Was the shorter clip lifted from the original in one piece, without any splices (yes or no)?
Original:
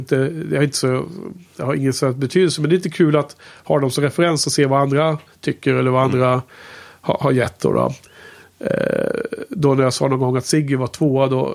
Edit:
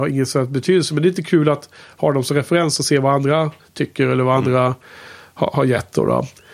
yes